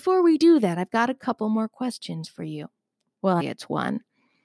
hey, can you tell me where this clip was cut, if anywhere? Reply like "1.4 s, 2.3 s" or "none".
3.4 s